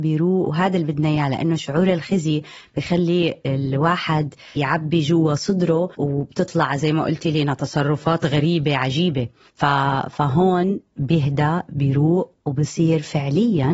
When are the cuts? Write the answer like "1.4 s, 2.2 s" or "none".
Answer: 4.6 s